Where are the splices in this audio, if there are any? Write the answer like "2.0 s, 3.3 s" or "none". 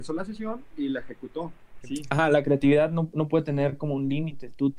1.8 s